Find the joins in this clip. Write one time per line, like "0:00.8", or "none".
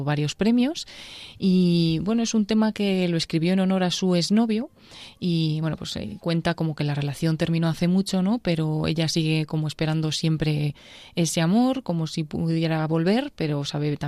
none